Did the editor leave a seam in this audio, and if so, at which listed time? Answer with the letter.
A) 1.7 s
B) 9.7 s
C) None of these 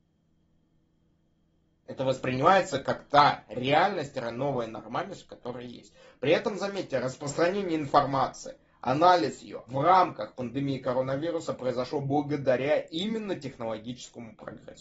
B